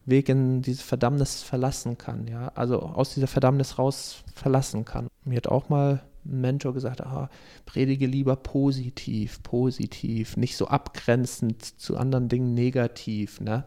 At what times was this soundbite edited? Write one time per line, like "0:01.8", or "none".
0:05.1